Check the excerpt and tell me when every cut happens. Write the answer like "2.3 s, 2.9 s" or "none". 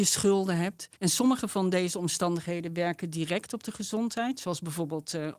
1.0 s